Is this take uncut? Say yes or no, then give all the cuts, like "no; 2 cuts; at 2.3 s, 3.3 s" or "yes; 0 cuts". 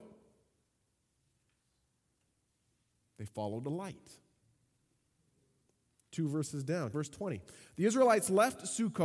no; 1 cut; at 6.9 s